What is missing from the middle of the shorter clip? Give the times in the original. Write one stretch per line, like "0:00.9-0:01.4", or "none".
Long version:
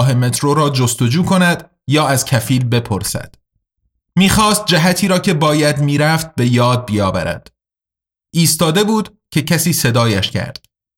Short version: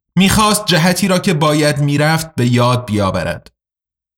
none

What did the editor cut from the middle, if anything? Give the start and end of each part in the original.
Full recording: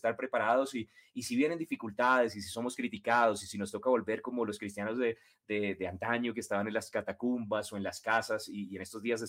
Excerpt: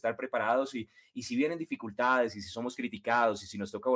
none

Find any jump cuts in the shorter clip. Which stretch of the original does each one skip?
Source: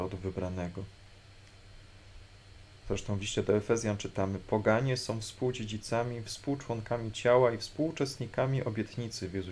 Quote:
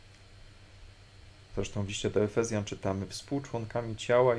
0:04.4-0:06.2

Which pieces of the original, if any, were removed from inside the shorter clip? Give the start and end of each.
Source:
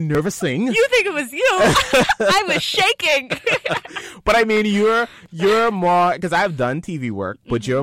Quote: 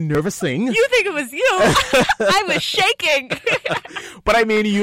none

